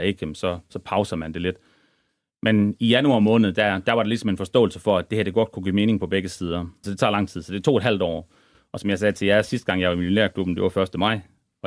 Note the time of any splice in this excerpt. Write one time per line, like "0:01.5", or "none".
0:06.8